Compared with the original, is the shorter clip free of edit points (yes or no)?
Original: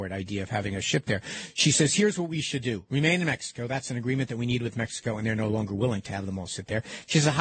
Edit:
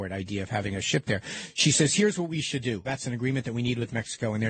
no